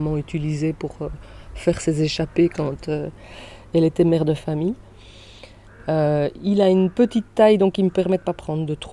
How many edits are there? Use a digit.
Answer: 0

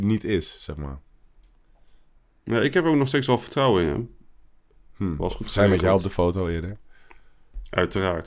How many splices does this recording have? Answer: 1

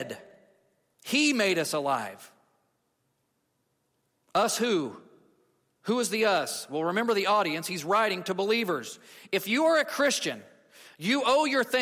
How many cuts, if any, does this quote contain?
1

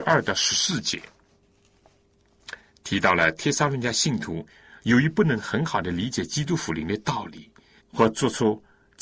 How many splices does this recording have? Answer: 1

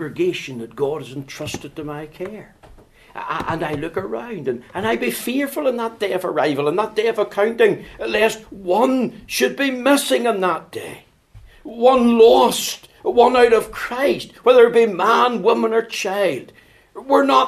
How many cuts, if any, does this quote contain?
0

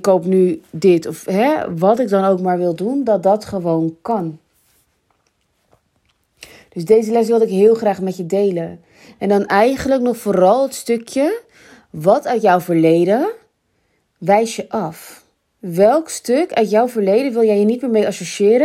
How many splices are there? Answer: 0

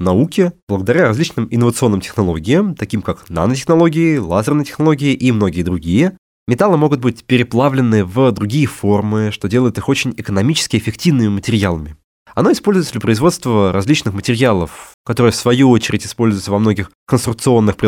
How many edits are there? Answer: 3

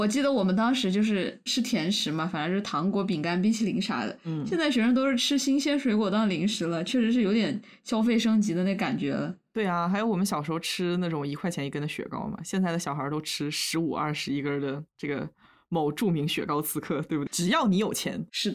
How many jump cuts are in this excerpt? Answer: 1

